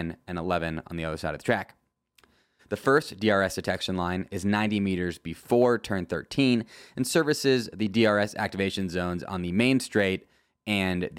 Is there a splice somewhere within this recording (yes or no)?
yes